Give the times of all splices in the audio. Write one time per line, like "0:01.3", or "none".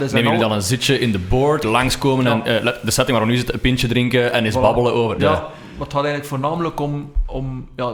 0:01.6
0:05.2

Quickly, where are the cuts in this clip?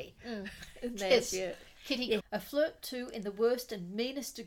0:02.2

